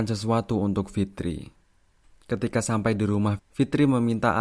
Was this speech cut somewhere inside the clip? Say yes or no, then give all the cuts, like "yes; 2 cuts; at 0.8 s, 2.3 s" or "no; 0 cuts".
yes; 1 cut; at 3.4 s